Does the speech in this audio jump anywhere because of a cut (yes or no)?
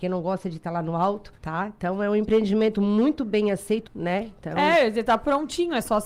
yes